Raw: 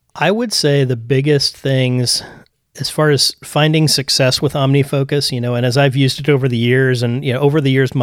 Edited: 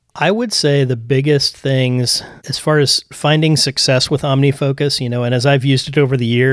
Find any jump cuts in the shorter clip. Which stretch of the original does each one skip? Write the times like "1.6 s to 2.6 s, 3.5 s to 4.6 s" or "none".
2.4 s to 2.7 s